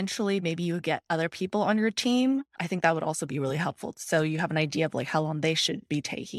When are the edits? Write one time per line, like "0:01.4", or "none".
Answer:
none